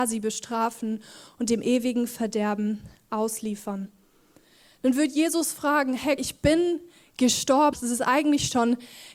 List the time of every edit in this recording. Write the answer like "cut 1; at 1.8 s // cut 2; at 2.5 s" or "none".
cut 1; at 6.2 s // cut 2; at 7.7 s